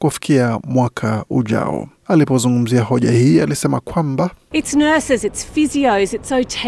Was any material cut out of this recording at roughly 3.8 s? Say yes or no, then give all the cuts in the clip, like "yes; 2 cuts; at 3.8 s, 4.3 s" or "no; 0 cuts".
no; 2 cuts; at 2.0 s, 5.2 s